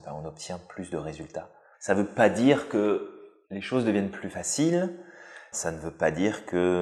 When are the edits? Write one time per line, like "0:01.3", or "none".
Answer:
0:01.7
0:03.4
0:05.5